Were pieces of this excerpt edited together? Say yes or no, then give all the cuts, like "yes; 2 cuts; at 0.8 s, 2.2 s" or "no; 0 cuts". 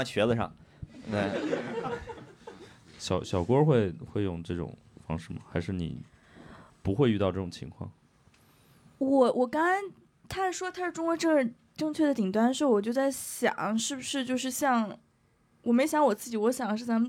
no; 0 cuts